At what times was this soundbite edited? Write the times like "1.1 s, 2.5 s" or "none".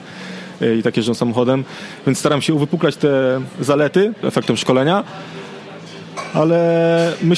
4.2 s